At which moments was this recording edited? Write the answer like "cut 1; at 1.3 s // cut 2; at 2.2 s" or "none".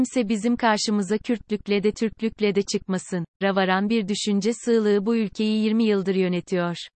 cut 1; at 3.4 s

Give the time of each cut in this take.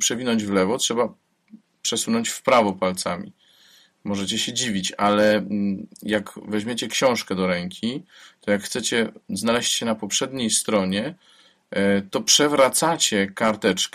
none

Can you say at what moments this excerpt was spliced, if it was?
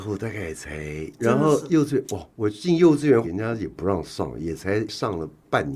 cut 1; at 1.2 s // cut 2; at 3.2 s

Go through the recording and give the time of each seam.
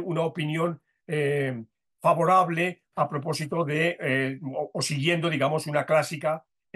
none

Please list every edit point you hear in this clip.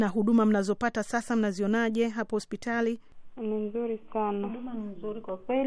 none

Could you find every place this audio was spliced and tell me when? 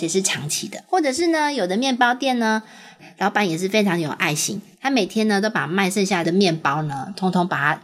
cut 1; at 6.2 s

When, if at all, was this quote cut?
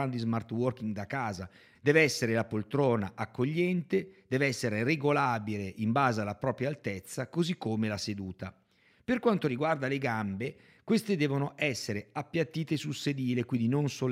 cut 1; at 1.8 s

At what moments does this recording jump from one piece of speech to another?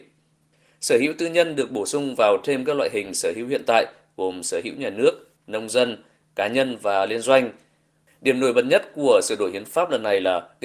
cut 1; at 5.4 s // cut 2; at 8.1 s

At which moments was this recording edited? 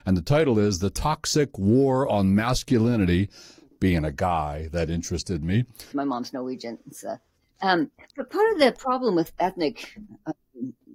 cut 1; at 5.9 s // cut 2; at 8.1 s

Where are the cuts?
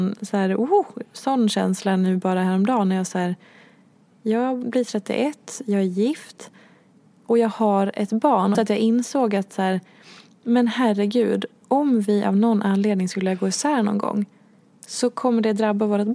cut 1; at 8.5 s

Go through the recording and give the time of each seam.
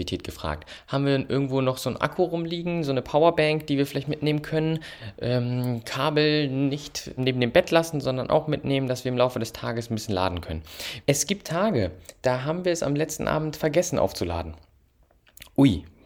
cut 1; at 7.2 s // cut 2; at 11.0 s

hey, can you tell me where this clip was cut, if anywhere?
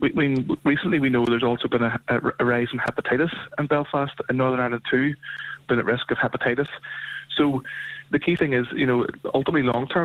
cut 1; at 4.3 s // cut 2; at 5.6 s

